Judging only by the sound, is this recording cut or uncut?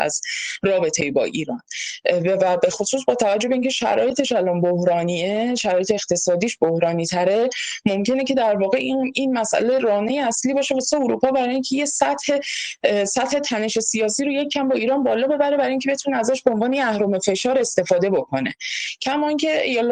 uncut